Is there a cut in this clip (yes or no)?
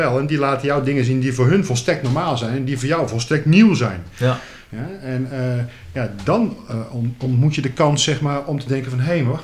no